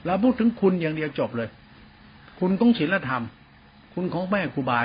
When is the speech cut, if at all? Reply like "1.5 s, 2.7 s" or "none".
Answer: none

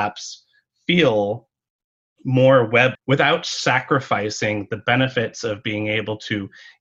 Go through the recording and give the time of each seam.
2.9 s

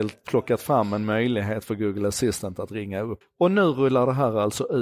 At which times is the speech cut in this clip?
3.2 s

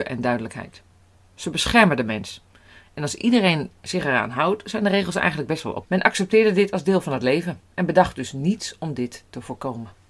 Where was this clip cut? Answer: 5.8 s

